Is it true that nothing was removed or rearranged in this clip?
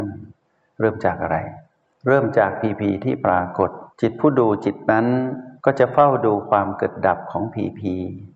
no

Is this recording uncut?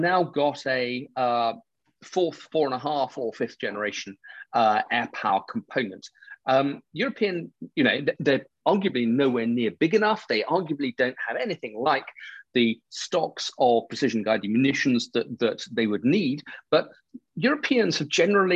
yes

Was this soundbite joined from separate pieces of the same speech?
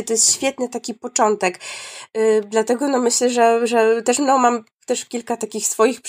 no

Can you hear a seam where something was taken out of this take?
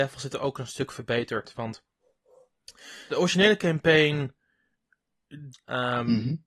yes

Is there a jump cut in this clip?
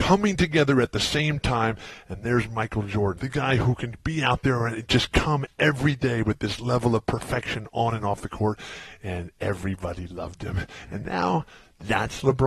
yes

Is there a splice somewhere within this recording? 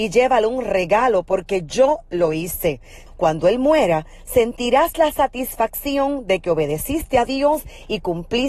yes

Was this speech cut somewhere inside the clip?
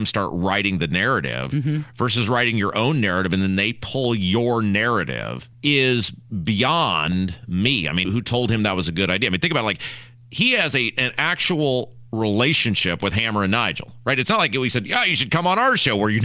yes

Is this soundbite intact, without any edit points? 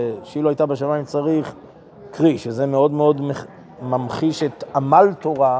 yes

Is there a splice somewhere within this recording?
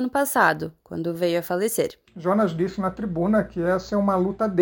yes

